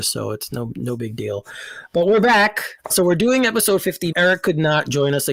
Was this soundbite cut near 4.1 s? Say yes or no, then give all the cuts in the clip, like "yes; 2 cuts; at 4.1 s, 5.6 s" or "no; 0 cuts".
yes; 2 cuts; at 2.9 s, 4.1 s